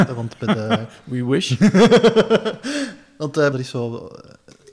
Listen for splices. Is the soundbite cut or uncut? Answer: cut